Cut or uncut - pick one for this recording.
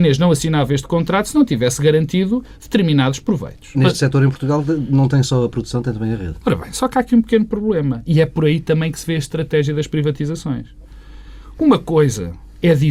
cut